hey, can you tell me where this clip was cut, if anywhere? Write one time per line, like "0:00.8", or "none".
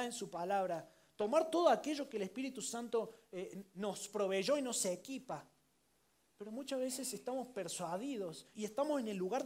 0:08.5